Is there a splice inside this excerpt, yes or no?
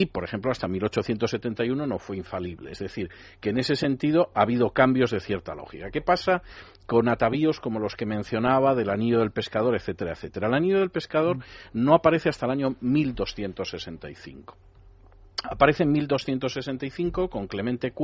no